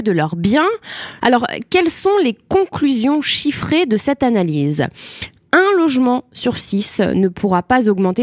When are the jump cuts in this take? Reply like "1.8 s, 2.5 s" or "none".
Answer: 1.2 s